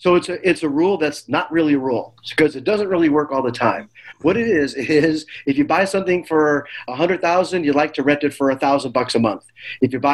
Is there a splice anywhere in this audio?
no; 0 cuts

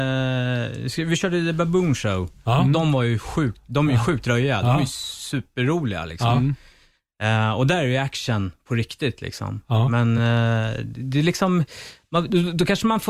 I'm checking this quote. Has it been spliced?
no; 0 cuts

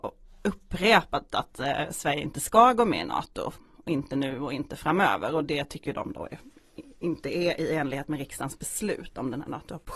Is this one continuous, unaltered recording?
yes; 0 cuts

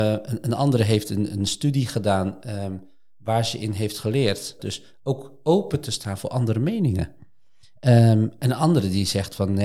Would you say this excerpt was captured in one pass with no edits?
no; 1 cut; at 4.6 s

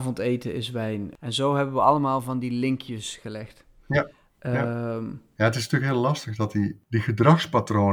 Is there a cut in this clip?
yes; 1 cut; at 5.4 s

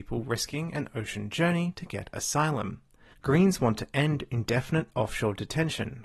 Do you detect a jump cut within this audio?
yes; 1 cut; at 3.1 s

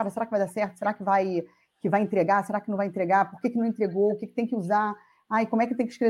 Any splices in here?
no; 0 cuts

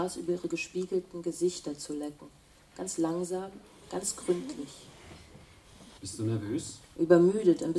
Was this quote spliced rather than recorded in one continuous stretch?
yes; 1 cut; at 6.0 s

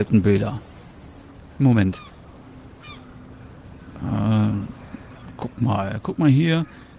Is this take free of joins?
yes; 0 cuts

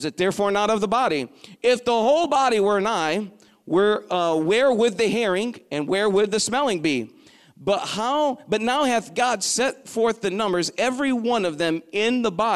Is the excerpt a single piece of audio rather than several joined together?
yes; 0 cuts

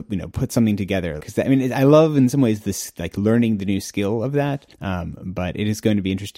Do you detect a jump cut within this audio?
yes; 2 cuts; at 1.2 s, 4.7 s

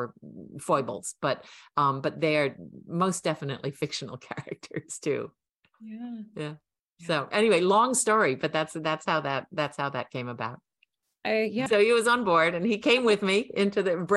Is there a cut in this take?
yes; 1 cut; at 11.7 s

